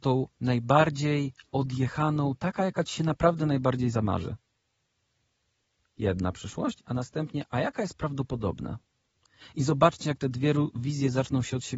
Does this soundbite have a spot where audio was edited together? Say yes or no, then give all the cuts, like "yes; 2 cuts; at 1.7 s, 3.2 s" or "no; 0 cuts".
no; 0 cuts